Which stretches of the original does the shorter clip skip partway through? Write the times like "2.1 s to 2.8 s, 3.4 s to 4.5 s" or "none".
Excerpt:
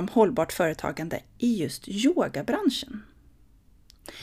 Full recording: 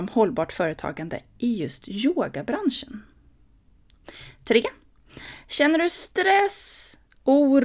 none